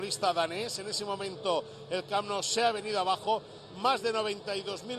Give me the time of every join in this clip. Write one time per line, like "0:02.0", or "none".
none